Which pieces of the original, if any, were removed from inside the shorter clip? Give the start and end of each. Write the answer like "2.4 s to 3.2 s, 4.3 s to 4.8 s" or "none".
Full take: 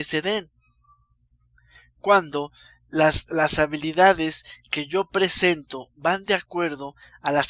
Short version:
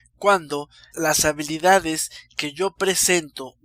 2.7 s to 3.3 s